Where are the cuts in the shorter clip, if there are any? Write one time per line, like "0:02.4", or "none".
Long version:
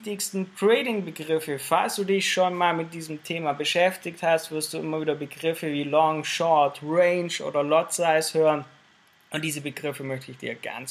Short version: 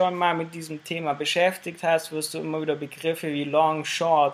none